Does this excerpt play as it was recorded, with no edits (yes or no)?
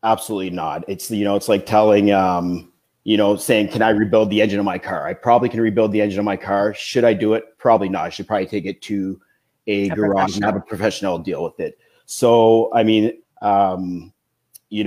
no